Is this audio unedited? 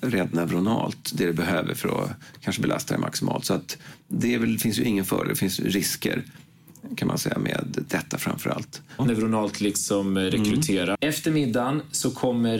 no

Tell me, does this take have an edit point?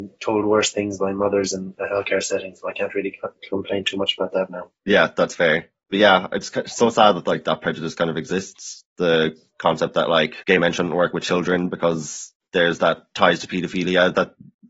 no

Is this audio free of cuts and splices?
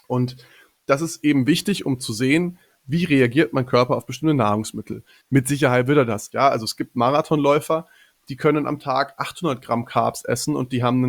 no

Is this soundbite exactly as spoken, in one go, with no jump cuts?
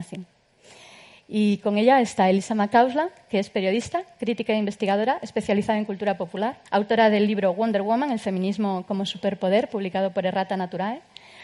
no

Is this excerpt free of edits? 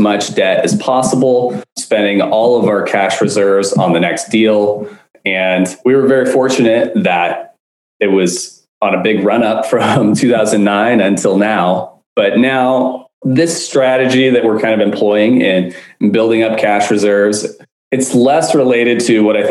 no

